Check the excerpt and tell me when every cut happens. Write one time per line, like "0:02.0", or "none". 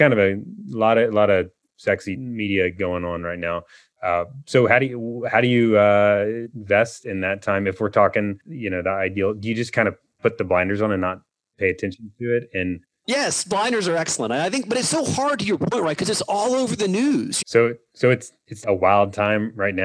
0:17.4
0:18.6